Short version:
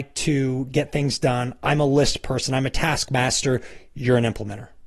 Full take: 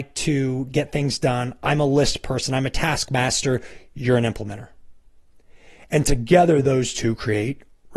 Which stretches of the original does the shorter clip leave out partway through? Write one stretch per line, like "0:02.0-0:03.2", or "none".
none